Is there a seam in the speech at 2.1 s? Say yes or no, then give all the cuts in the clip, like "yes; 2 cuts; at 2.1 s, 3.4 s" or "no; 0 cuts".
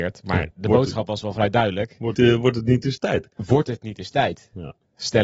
yes; 1 cut; at 2.1 s